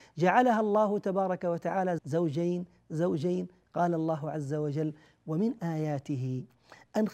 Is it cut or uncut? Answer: cut